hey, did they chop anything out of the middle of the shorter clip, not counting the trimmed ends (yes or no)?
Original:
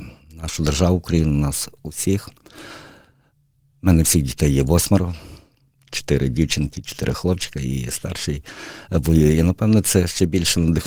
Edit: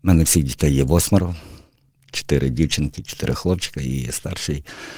no